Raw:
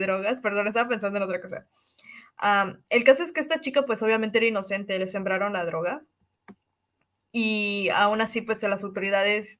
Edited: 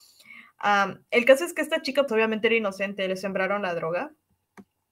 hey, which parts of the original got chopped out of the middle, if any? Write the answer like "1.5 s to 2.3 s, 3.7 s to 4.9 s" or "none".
3.9 s to 4.0 s